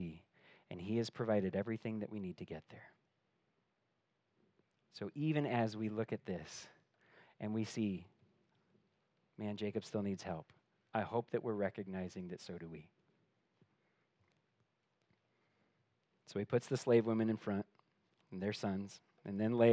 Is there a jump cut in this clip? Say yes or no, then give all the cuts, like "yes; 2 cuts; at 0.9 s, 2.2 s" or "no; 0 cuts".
no; 0 cuts